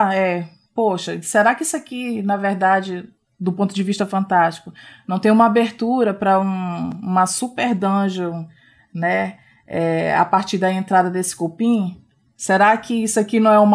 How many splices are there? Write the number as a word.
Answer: zero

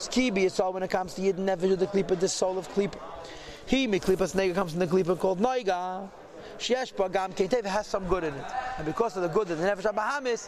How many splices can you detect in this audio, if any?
zero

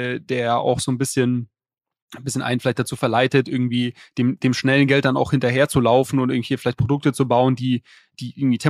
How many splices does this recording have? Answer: zero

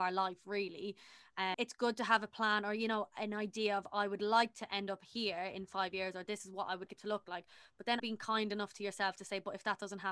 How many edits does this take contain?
three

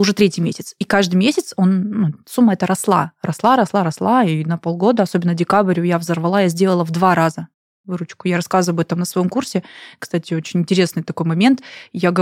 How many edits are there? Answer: zero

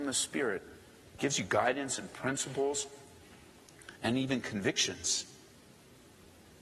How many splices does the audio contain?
two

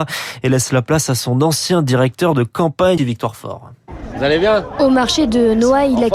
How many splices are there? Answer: one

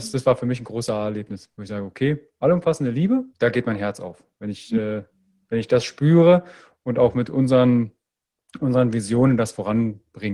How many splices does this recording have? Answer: one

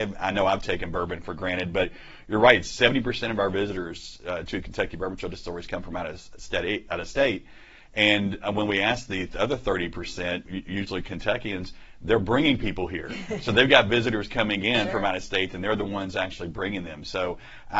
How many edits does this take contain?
one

